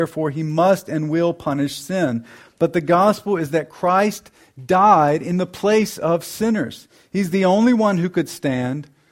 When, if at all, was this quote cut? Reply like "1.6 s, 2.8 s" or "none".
none